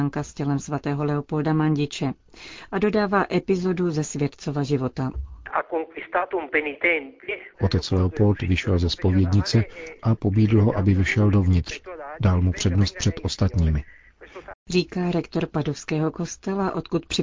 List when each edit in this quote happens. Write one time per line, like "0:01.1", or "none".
0:07.5
0:14.5